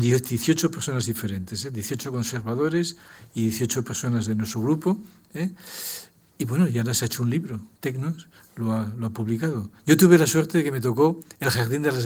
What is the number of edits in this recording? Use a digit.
1